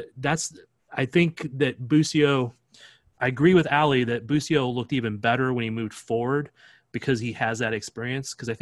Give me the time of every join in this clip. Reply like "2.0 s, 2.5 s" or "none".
none

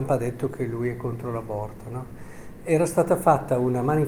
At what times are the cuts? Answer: none

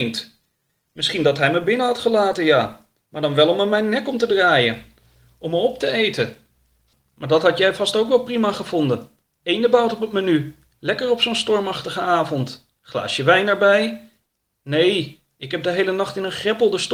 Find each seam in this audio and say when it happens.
none

